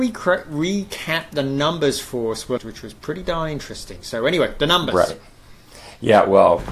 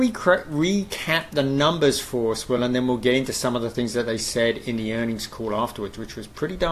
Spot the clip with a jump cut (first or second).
first